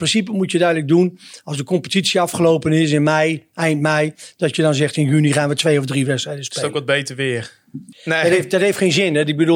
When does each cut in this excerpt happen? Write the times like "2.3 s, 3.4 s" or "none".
7.9 s